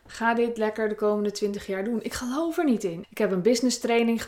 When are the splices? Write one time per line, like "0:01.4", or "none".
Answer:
0:03.0